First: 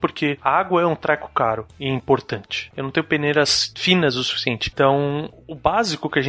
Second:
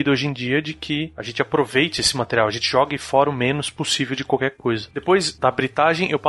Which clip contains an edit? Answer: first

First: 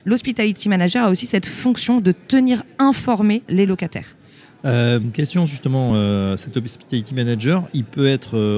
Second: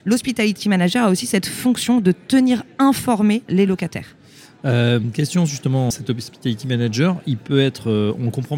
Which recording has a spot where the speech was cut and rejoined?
second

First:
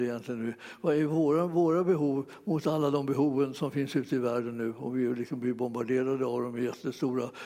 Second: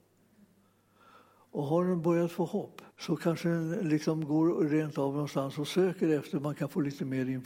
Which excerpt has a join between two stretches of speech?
second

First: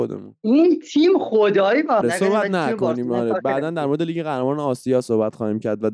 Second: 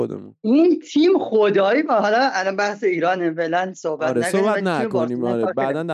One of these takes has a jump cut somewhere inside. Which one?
first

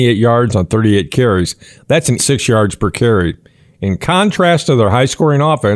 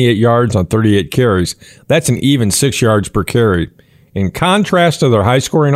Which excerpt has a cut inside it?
first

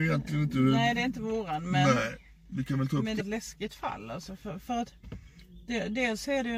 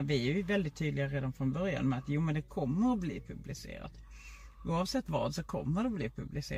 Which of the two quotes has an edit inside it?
first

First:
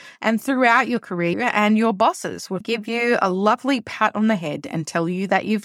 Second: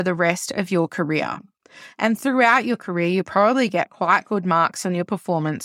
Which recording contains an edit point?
first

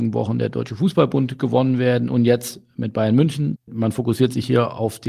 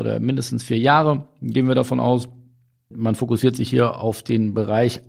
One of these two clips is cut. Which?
first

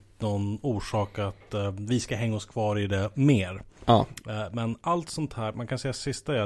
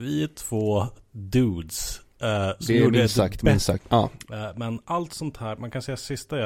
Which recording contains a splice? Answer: second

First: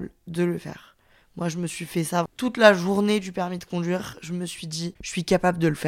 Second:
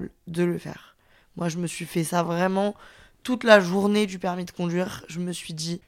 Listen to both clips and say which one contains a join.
first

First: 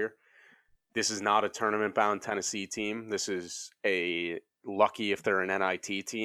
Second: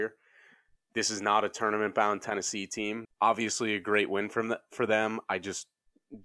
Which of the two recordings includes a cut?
second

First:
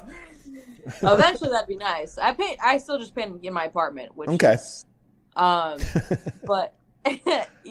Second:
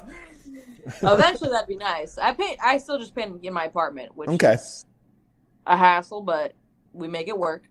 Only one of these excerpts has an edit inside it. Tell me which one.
first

